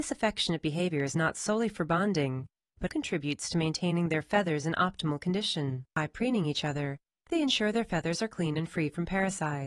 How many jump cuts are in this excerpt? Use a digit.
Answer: 1